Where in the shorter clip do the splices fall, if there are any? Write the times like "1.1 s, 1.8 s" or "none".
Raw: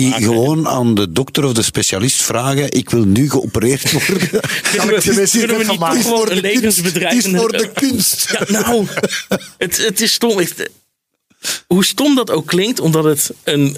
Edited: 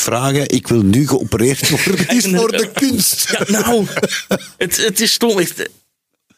2.1 s